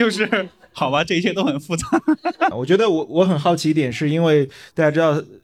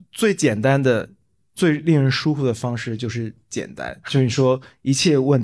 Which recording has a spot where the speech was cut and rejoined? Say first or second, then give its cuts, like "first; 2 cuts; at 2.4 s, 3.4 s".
first; 1 cut; at 2.5 s